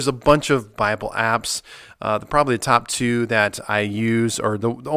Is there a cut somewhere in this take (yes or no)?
no